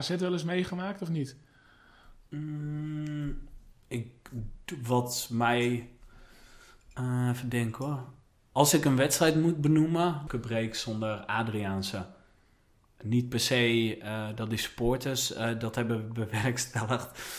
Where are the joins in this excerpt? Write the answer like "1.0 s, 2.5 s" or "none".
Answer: 10.3 s